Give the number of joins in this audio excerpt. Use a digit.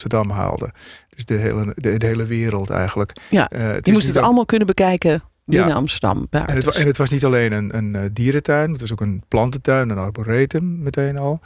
0